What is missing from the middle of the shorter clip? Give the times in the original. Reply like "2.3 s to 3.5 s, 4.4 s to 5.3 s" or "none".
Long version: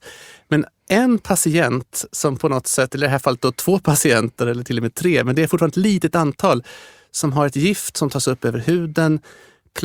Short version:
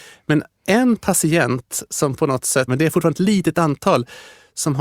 2.9 s to 5.2 s